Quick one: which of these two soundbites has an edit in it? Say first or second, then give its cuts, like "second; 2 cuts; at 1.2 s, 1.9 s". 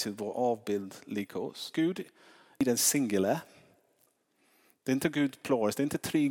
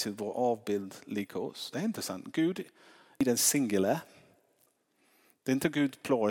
first; 1 cut; at 1.7 s